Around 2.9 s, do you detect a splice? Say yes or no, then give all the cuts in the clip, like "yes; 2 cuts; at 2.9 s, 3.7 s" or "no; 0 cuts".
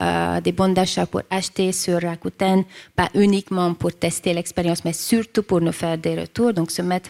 no; 0 cuts